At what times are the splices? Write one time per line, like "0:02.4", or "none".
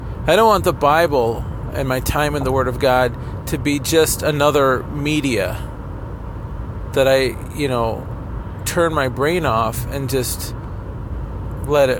none